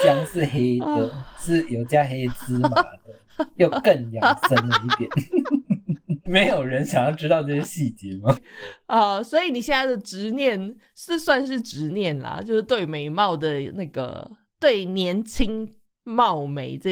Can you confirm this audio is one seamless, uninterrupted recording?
no; 2 cuts; at 6.3 s, 8.4 s

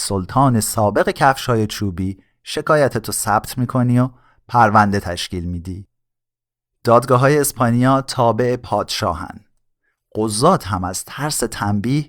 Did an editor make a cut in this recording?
no; 0 cuts

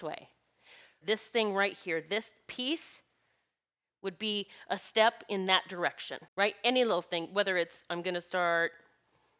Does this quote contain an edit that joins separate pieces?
yes; 2 cuts; at 1.0 s, 6.3 s

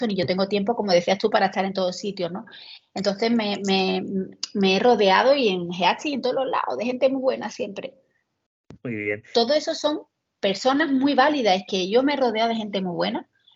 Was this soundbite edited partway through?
yes; 1 cut; at 9.3 s

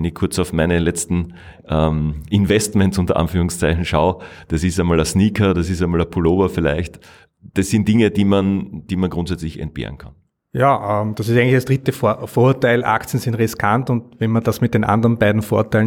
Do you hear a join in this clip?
no; 0 cuts

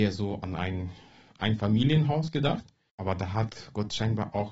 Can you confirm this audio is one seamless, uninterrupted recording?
no; 1 cut; at 2.9 s

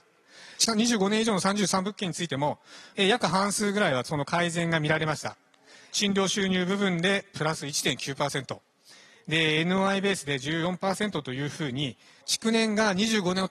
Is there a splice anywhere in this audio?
no; 0 cuts

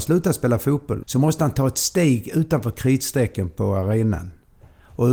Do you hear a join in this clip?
yes; 1 cut; at 1.0 s

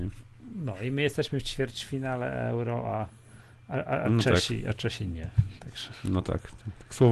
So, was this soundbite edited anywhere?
no; 0 cuts

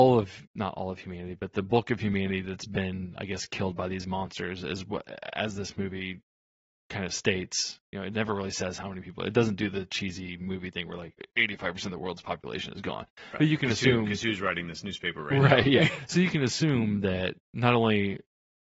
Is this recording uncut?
yes; 0 cuts

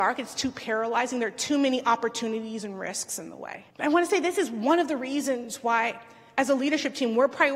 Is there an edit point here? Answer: yes; 1 cut; at 3.7 s

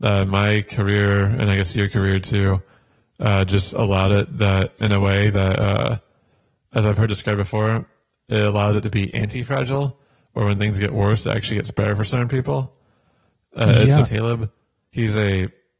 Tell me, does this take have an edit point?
yes; 1 cut; at 14.0 s

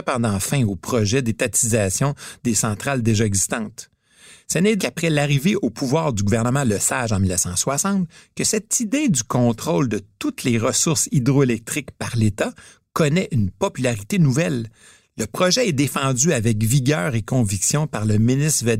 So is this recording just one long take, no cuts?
no; 1 cut; at 4.8 s

